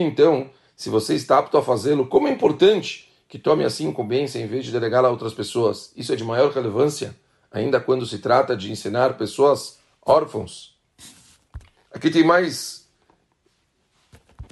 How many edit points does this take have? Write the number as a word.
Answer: one